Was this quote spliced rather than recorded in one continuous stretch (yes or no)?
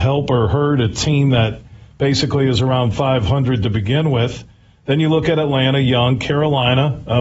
no